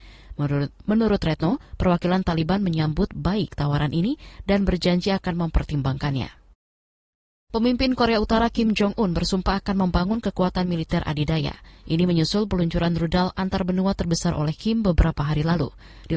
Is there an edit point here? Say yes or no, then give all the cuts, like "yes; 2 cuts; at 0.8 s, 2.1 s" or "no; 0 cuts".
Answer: no; 0 cuts